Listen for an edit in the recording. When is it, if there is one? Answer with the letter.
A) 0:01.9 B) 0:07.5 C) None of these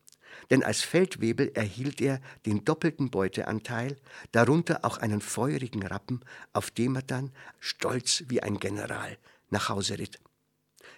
B